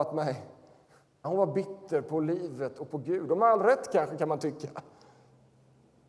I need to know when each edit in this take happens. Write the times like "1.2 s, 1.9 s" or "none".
1.2 s